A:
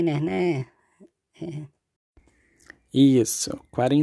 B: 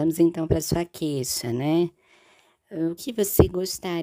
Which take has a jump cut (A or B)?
B